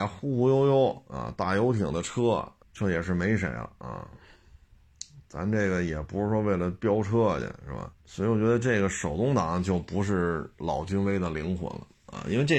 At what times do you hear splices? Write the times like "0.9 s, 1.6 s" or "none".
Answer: 2.6 s, 8.0 s